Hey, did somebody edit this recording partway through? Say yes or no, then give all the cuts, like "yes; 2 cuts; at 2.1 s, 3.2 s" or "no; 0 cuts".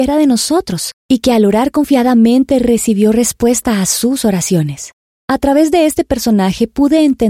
no; 0 cuts